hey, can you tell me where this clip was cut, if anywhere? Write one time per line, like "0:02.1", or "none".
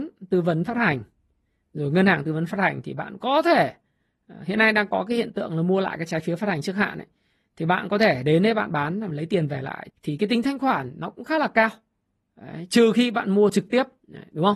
0:09.9